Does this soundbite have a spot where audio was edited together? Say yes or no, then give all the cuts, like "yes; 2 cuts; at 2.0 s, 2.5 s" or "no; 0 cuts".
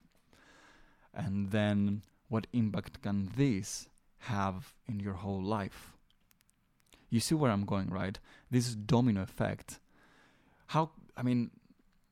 no; 0 cuts